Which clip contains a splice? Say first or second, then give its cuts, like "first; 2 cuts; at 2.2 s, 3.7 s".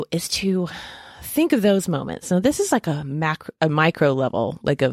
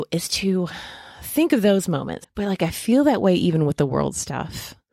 second; 1 cut; at 2.2 s